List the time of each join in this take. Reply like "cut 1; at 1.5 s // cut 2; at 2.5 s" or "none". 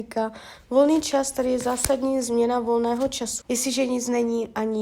cut 1; at 3.4 s